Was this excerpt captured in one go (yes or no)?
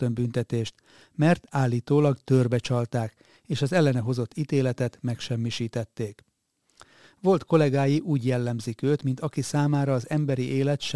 yes